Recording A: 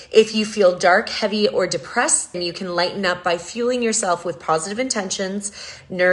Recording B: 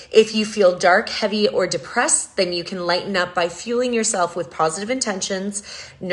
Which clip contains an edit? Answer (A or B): A